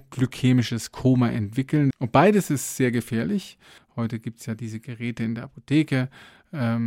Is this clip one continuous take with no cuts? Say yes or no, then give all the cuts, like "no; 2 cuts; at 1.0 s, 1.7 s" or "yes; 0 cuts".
no; 2 cuts; at 1.9 s, 3.8 s